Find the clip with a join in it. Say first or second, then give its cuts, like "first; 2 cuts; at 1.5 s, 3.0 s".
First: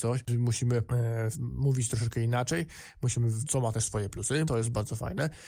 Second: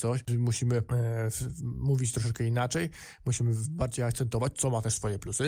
first; 3 cuts; at 1.3 s, 3.4 s, 4.4 s